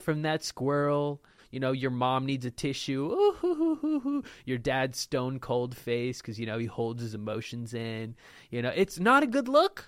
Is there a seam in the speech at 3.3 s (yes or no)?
no